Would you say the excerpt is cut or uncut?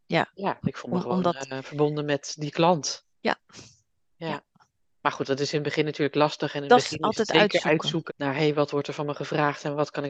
cut